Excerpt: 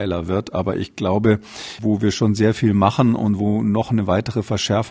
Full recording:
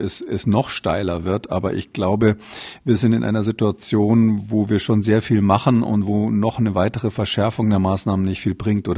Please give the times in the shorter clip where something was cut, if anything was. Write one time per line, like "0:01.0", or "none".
0:01.8